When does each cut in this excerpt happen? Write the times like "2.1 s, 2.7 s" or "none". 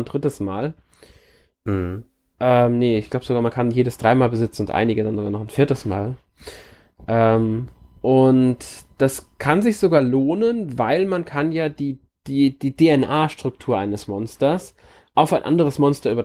none